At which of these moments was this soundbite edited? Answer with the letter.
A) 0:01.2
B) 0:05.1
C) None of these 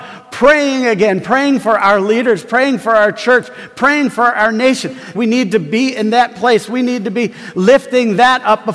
B